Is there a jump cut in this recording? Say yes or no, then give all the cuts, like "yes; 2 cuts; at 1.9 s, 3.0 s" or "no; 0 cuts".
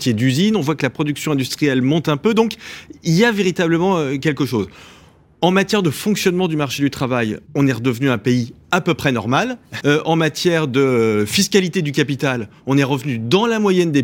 yes; 2 cuts; at 7.5 s, 9.8 s